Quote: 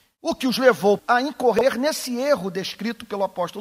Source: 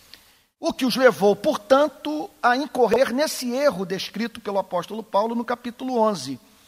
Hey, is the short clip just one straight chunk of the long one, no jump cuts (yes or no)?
no